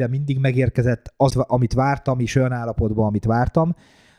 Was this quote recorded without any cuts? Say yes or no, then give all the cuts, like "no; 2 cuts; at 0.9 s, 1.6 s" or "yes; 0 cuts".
no; 1 cut; at 1.3 s